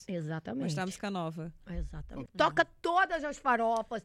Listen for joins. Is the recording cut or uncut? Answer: cut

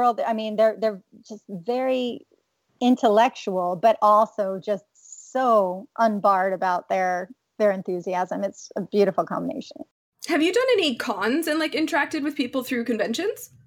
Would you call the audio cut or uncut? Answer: uncut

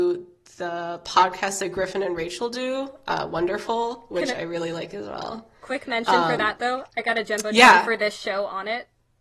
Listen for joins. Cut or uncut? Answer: uncut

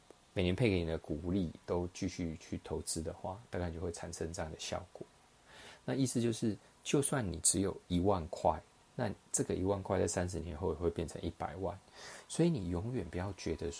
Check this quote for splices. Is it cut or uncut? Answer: uncut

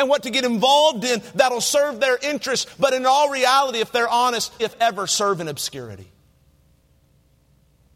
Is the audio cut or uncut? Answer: cut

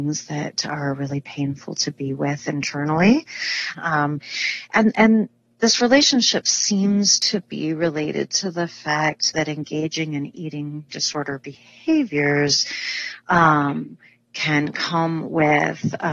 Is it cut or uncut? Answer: cut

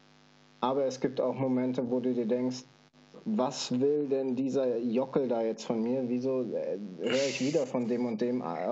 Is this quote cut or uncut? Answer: uncut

